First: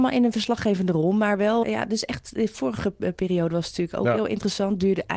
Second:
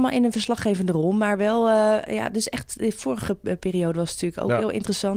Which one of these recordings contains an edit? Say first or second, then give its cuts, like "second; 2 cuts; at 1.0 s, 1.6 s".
first; 1 cut; at 1.6 s